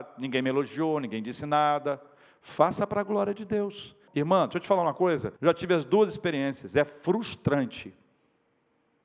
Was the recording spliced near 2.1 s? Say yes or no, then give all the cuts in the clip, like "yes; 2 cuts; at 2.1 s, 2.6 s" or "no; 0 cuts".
no; 2 cuts; at 4.1 s, 5.4 s